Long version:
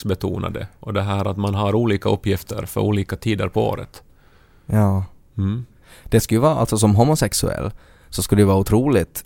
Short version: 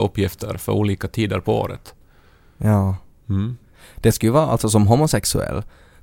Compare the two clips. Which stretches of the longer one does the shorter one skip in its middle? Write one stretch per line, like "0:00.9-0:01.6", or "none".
none